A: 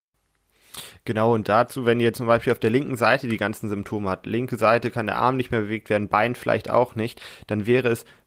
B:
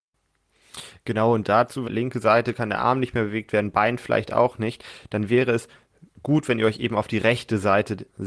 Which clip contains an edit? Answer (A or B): B